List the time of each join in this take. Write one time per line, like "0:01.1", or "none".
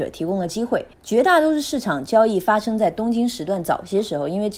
0:00.9